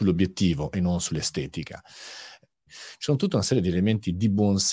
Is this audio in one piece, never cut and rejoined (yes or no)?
no